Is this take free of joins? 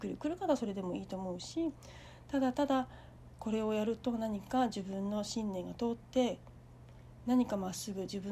yes; 0 cuts

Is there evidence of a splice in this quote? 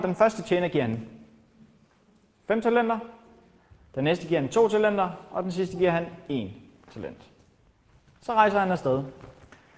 no; 0 cuts

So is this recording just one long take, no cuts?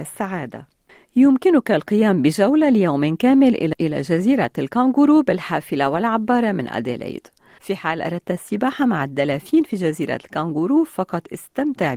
no; 1 cut; at 7.6 s

